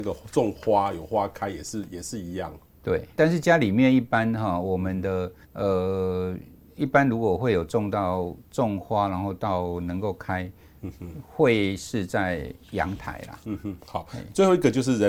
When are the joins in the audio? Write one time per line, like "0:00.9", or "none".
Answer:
0:03.1
0:05.4
0:13.4